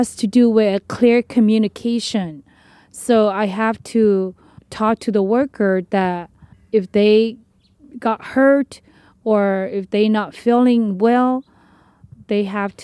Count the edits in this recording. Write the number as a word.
zero